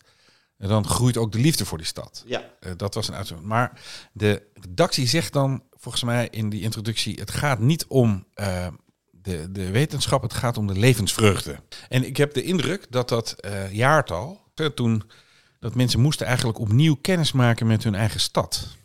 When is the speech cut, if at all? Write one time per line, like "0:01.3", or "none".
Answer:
0:14.6